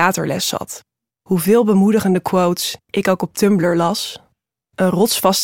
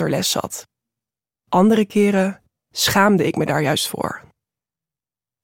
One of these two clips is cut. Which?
first; 1 cut; at 1.1 s

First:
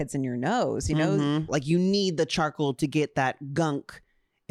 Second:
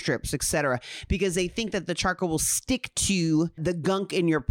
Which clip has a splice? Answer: first; 1 cut; at 1.5 s

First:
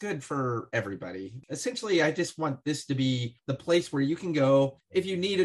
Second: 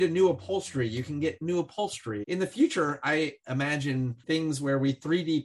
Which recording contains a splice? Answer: second; 1 cut; at 2.2 s

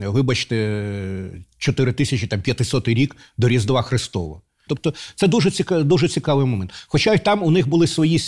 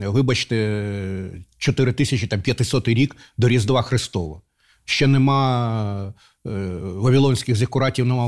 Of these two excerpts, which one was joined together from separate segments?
first; 1 cut; at 4.7 s

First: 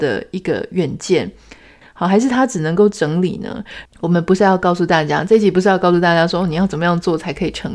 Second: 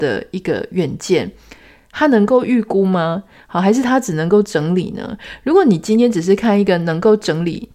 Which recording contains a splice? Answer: first; 2 cuts; at 1.8 s, 3.9 s

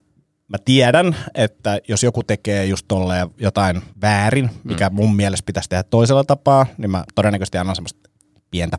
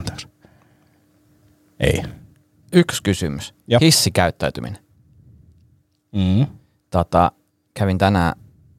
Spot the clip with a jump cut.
first; 1 cut; at 3.9 s

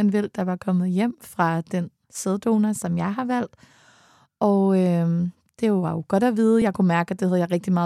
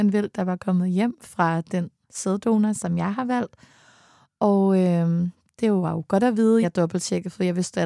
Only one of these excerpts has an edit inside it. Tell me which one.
second; 1 cut; at 6.6 s

